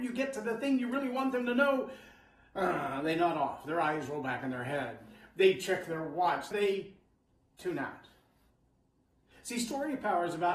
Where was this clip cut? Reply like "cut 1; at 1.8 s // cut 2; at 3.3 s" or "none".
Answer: cut 1; at 6.5 s